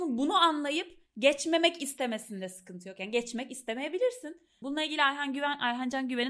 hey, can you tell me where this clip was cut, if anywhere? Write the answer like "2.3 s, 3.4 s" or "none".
4.6 s